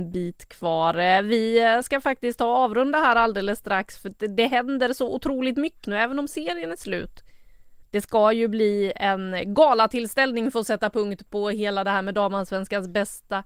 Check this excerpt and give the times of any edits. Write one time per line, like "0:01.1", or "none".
0:05.8
0:07.8

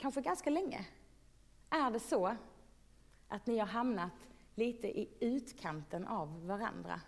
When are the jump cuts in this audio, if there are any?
0:01.6

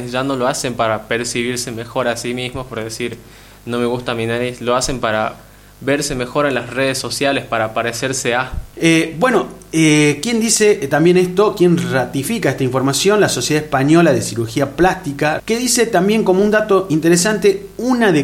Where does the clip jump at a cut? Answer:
0:08.7
0:15.4

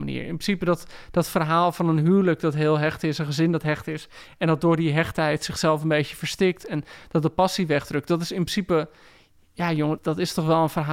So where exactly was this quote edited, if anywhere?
0:10.0

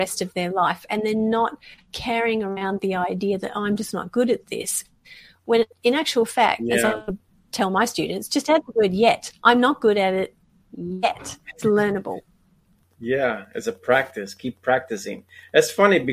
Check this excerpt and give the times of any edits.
none

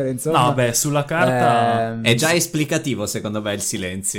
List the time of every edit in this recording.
none

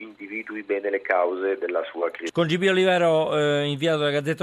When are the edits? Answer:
0:02.3

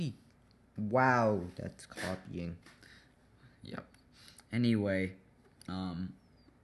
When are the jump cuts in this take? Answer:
none

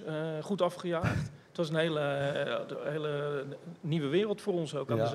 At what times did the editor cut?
none

